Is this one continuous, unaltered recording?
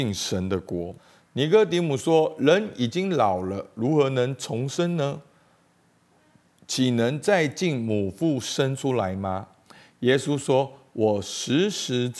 no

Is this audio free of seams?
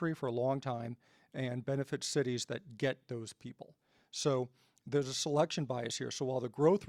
yes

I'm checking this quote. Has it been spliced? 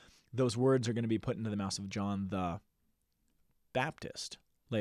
no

